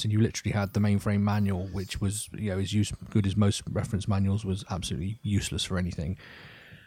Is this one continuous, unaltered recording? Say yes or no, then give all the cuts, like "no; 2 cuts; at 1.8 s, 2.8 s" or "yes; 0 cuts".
yes; 0 cuts